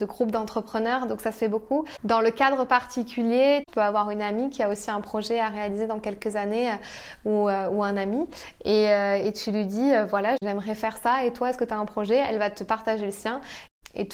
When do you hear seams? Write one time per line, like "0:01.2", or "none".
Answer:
none